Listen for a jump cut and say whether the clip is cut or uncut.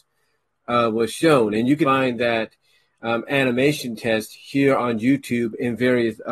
cut